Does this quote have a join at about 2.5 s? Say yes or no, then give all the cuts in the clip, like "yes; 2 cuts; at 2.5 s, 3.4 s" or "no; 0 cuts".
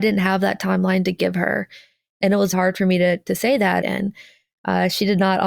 yes; 2 cuts; at 2.5 s, 3.8 s